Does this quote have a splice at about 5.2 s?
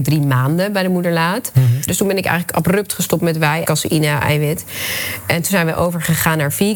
no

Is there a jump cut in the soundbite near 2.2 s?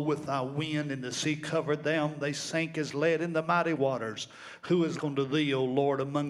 no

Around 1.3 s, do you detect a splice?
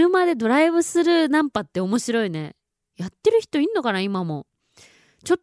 no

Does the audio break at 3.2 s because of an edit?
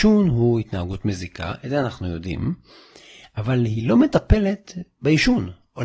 no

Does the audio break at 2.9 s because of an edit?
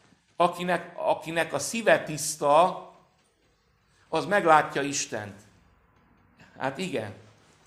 no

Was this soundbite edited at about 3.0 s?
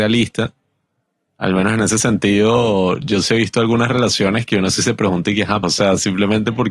no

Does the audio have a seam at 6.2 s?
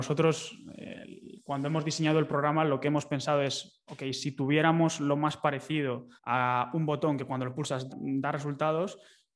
yes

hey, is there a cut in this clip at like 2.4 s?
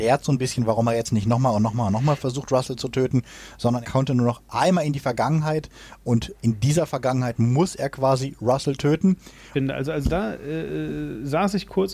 no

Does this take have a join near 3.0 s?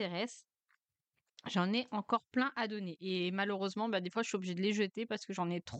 no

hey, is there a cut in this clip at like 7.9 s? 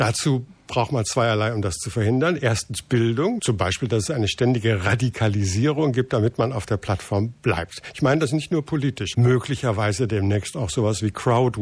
no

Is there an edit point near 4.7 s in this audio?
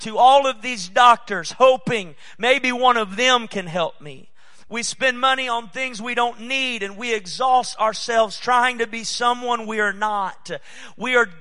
yes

